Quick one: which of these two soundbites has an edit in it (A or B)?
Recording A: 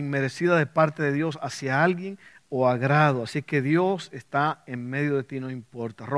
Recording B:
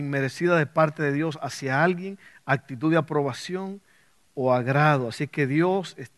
A